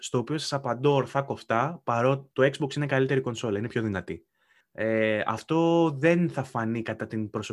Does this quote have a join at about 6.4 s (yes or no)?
no